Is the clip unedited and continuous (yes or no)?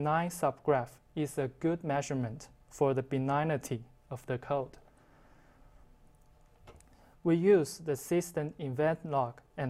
no